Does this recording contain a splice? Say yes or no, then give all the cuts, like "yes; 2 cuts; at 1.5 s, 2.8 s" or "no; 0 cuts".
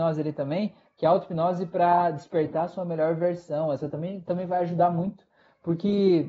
no; 0 cuts